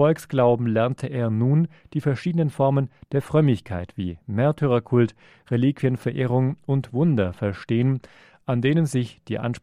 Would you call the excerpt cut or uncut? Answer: uncut